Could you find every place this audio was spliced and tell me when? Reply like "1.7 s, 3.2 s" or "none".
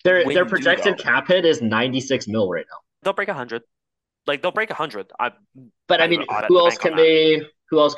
3.0 s, 6.4 s